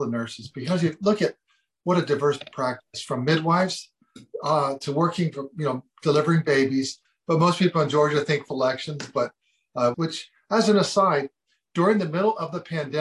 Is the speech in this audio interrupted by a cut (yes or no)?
yes